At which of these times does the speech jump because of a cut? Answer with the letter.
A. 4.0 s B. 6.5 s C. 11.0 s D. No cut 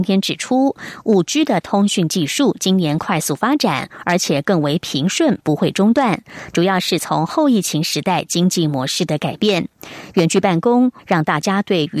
C